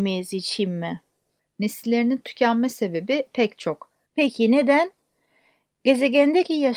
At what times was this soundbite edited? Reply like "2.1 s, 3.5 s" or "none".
1.4 s, 4.1 s